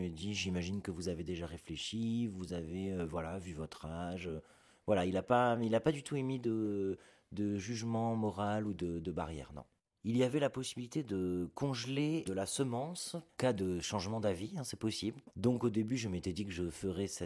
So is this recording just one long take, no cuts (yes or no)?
yes